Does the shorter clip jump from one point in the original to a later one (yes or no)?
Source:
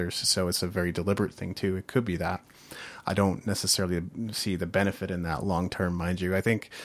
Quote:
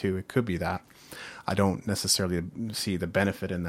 no